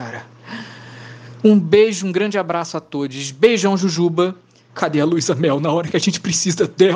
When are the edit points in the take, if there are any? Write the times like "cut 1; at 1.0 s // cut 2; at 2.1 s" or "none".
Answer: cut 1; at 4.7 s